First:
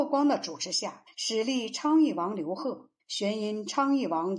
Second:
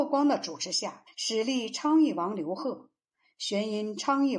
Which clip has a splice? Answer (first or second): first